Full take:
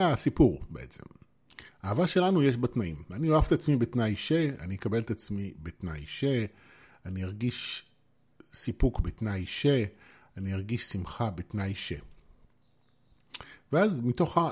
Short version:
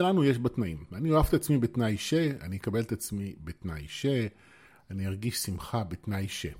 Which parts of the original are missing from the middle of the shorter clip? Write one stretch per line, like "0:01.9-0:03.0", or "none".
0:06.9-0:10.2

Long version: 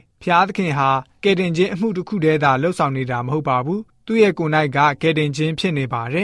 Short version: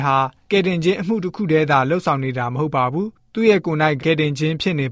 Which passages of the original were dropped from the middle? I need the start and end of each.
0:04.7-0:05.0

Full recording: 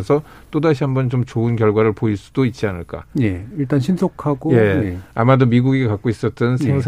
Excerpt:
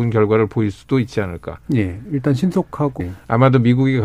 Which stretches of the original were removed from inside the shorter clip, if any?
0:04.5-0:04.9

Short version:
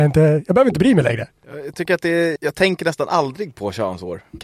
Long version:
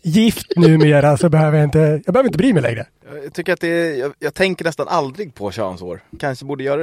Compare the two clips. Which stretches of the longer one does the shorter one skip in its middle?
0:03.9-0:04.2

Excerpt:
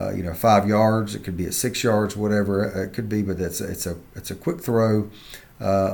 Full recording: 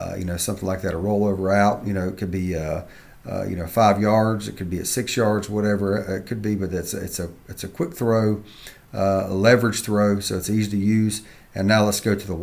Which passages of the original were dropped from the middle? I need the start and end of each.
none

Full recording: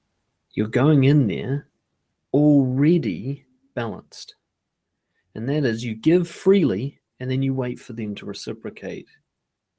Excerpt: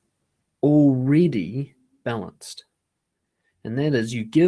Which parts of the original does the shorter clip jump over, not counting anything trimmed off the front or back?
none

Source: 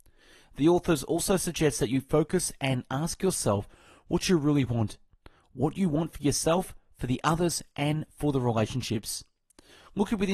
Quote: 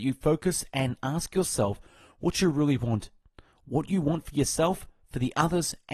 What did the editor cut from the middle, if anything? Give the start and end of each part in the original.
none

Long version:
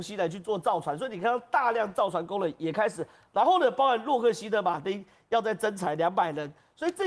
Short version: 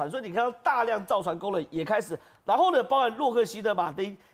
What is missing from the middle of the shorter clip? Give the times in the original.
none

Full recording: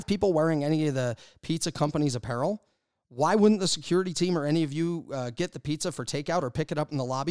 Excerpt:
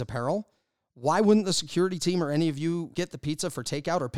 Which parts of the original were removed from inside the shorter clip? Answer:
0:05.1-0:05.3

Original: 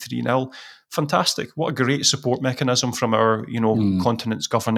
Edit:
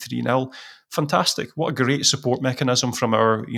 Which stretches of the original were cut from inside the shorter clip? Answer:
none

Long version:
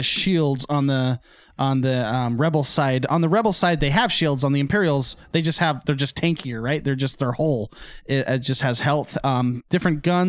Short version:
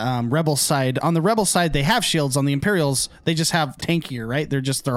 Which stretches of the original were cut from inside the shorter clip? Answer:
0:05.9-0:06.1

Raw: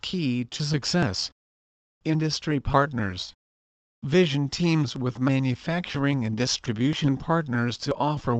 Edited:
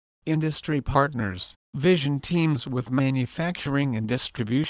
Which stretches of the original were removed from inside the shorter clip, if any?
0:03.4-0:03.9

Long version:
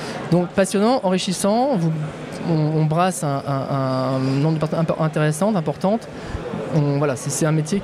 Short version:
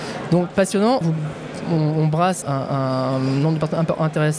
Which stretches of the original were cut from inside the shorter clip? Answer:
0:01.0-0:01.8
0:03.2-0:03.4

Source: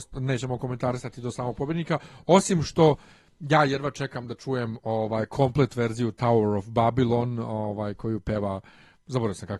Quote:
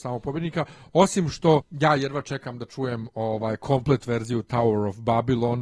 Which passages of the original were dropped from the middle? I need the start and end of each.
0:02.9-0:03.3

